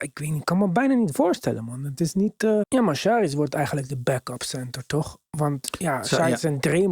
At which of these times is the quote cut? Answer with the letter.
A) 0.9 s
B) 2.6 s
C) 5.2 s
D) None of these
B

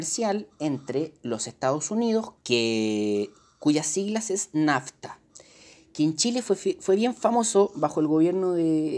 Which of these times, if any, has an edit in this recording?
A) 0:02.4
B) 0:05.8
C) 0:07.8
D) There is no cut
A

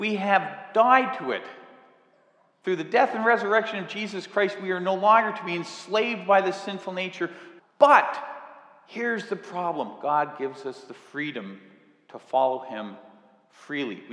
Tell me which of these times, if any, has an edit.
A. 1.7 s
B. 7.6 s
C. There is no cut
B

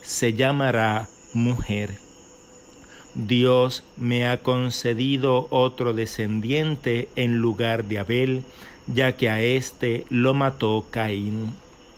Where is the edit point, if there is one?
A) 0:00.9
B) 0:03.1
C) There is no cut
B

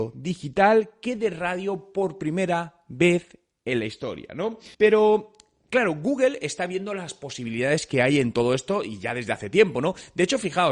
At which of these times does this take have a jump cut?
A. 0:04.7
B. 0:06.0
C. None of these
A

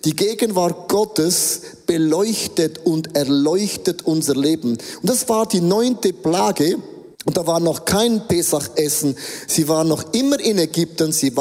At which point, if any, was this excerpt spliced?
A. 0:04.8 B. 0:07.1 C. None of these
B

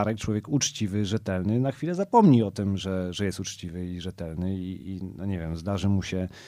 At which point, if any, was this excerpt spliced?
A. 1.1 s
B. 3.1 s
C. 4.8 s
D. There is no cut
C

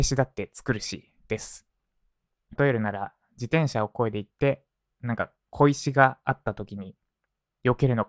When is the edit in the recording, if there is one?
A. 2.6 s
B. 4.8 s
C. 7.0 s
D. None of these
A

